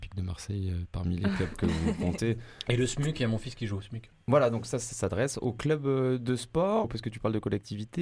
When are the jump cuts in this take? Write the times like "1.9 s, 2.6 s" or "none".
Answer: 4.1 s, 6.8 s